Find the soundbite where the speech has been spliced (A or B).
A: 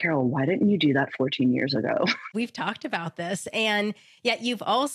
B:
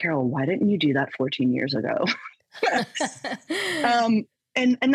A